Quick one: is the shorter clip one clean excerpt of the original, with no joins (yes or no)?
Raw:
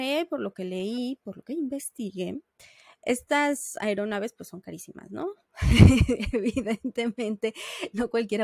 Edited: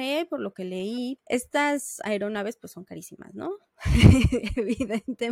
no